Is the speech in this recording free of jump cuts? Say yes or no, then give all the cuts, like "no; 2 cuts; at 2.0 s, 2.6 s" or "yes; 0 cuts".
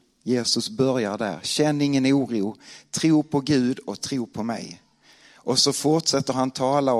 yes; 0 cuts